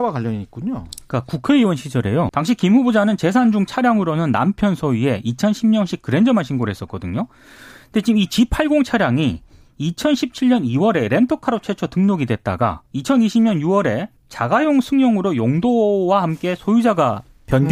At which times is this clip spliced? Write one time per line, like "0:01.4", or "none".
0:02.3
0:12.9
0:14.2